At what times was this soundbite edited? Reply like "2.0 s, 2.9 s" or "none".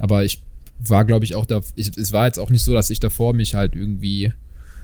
none